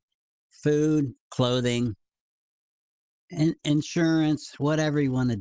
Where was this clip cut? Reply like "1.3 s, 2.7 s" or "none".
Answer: 1.2 s